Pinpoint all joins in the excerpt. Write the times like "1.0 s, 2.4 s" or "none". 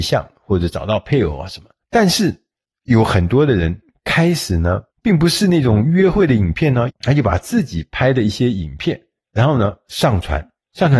1.8 s, 4.9 s, 6.9 s